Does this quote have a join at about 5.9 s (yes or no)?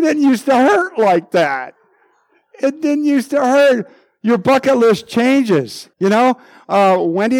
yes